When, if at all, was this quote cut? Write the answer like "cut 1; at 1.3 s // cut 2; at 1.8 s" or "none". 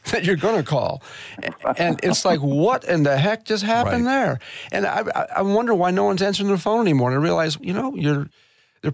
cut 1; at 7.6 s